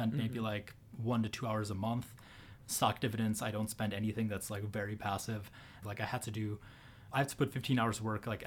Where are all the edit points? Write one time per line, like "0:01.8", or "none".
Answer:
0:05.8
0:07.1